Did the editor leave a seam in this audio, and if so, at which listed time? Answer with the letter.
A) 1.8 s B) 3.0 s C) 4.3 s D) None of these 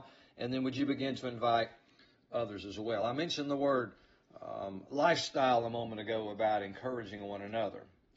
D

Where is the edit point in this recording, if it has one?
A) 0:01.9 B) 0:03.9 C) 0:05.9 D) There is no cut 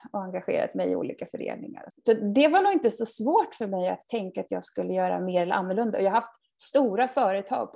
A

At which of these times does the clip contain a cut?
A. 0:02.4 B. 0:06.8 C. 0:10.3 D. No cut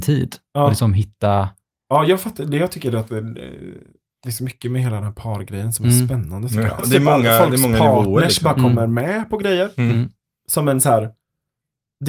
B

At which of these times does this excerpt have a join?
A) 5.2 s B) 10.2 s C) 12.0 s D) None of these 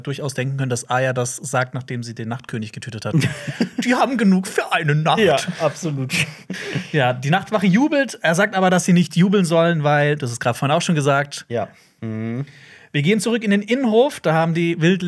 C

